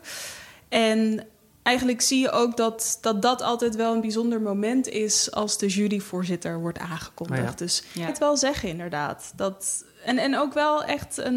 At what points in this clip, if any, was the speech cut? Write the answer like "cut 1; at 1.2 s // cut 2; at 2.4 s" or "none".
cut 1; at 8.1 s